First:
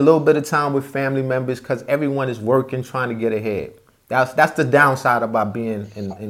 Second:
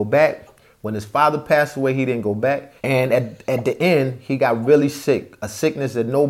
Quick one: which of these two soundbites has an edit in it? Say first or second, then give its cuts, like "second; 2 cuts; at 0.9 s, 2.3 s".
second; 1 cut; at 2.8 s